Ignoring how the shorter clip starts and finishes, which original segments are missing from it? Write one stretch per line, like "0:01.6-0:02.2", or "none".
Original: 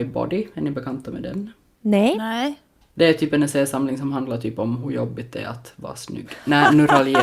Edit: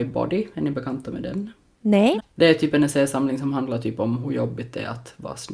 0:02.2-0:02.8

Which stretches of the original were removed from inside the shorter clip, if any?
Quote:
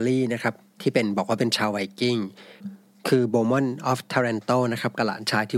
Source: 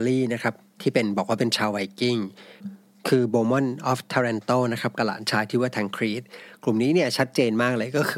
none

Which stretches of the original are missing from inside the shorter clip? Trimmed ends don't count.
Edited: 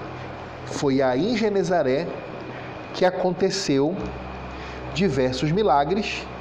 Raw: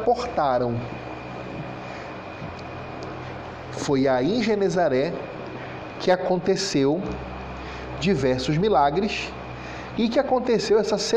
none

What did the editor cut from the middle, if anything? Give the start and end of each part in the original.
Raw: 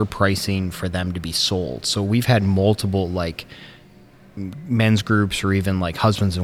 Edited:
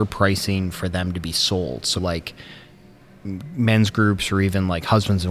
0:02.0-0:03.1

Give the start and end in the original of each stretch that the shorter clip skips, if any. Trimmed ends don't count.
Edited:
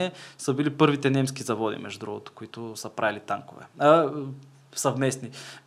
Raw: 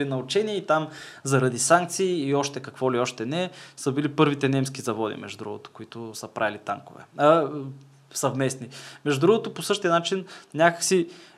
none

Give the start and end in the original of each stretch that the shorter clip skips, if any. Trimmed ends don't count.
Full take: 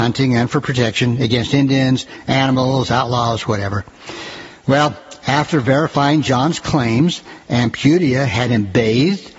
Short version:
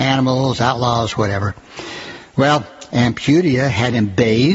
0:05.2-0:07.5

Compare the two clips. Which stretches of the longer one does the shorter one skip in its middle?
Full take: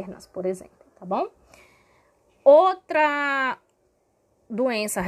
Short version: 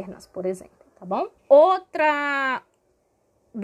0:01.4-0:02.3

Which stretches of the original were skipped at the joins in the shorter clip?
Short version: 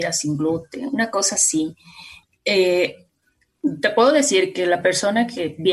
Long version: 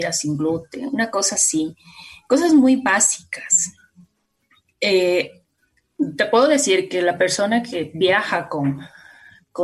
0:02.2-0:04.6

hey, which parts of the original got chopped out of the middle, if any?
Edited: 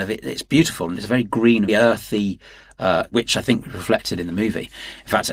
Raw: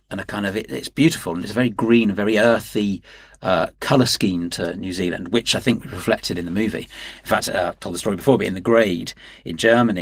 0:02.1-0:02.3
0:03.7-0:05.3

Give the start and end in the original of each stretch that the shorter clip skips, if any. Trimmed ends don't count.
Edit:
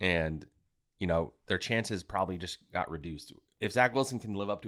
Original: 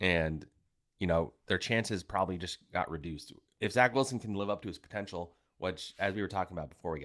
none

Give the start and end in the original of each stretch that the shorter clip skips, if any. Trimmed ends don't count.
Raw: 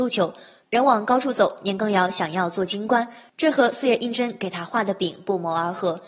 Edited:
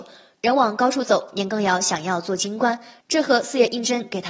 none

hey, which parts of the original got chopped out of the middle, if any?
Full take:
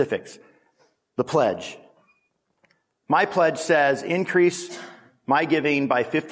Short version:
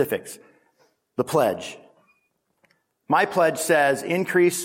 none

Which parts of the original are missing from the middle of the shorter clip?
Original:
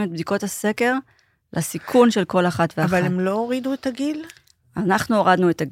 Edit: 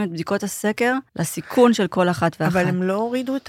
0:01.1-0:01.4

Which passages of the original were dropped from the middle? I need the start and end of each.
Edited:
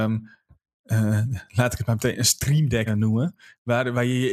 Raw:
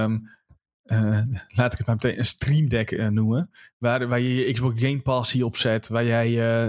0:02.9-0:03.0

